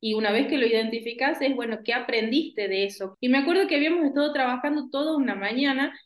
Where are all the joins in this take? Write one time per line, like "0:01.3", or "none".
0:03.1